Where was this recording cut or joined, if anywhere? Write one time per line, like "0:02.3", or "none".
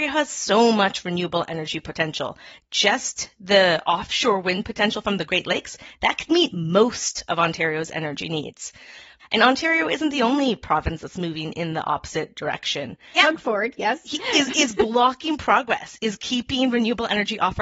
0:09.2
0:13.2